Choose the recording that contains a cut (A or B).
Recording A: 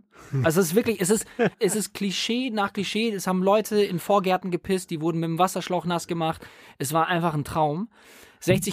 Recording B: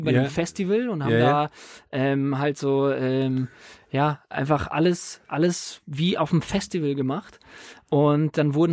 A